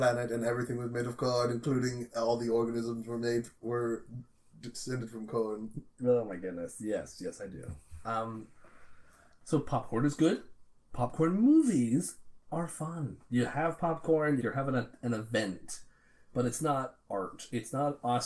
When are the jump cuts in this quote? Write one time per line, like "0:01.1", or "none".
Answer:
0:14.4